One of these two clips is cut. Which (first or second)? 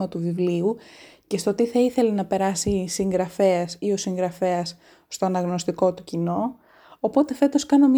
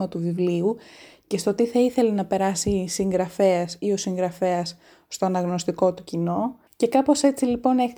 second